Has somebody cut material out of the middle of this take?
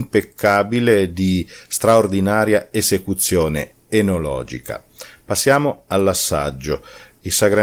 no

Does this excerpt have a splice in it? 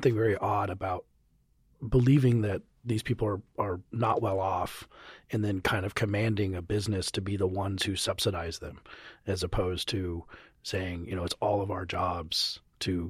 no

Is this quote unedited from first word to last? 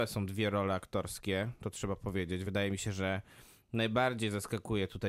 yes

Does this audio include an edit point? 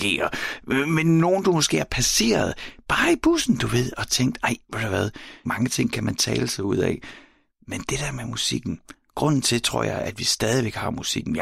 yes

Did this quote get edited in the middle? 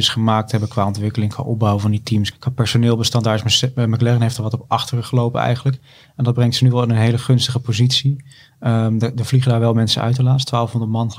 yes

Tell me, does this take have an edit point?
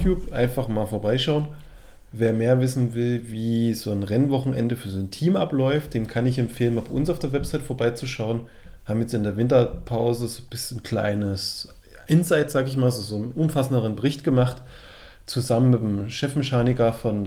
no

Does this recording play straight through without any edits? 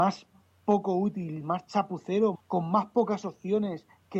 no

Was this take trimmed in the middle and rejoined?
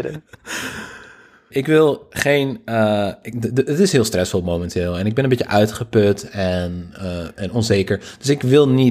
yes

